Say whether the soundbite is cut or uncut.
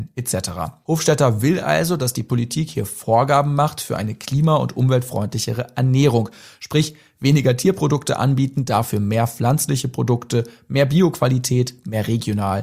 uncut